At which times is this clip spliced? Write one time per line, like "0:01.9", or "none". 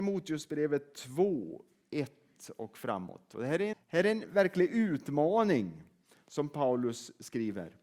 0:03.7